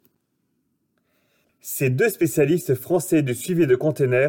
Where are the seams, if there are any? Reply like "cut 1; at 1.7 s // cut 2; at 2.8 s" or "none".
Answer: cut 1; at 1.4 s